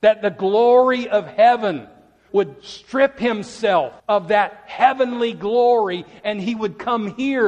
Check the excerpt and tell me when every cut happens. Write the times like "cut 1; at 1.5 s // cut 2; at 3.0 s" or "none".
cut 1; at 2.3 s // cut 2; at 4.0 s